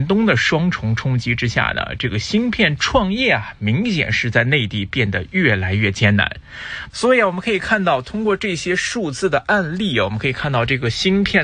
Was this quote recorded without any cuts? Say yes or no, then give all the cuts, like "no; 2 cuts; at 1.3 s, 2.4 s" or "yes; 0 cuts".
no; 1 cut; at 6.9 s